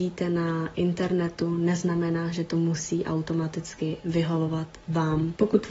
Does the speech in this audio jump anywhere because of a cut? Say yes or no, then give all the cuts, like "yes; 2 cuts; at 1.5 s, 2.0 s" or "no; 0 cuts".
no; 0 cuts